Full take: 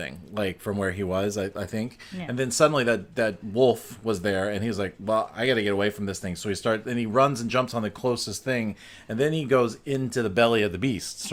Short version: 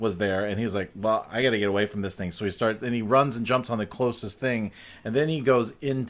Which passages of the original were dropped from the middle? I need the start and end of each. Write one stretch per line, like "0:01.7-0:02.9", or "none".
none